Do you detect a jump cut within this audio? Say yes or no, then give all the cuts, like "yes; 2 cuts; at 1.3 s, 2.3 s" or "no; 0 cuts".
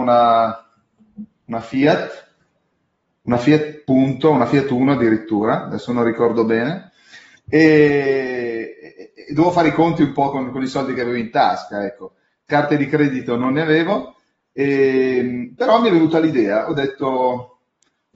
no; 0 cuts